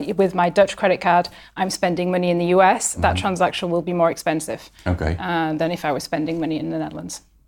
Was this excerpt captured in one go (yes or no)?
yes